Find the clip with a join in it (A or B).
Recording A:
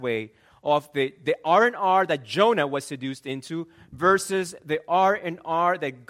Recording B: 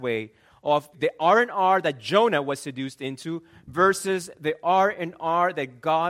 B